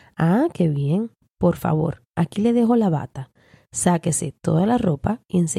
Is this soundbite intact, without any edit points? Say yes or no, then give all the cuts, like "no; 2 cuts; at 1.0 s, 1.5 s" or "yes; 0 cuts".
yes; 0 cuts